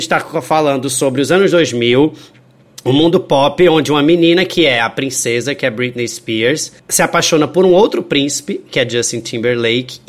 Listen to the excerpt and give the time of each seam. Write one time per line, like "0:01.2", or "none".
0:06.8